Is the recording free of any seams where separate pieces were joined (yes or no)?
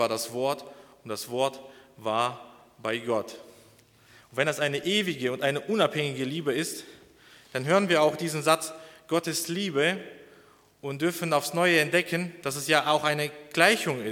yes